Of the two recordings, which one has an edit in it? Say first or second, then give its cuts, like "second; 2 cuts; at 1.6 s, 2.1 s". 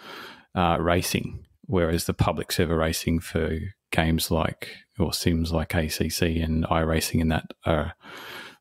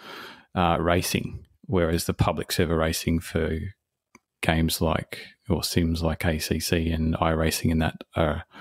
first; 1 cut; at 3.8 s